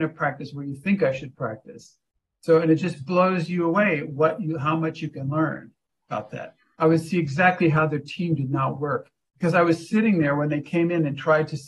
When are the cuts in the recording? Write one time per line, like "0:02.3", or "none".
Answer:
0:06.7